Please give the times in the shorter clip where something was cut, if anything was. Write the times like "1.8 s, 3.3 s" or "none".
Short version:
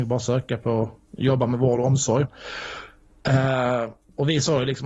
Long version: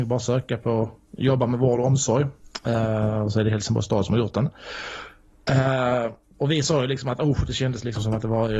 2.2 s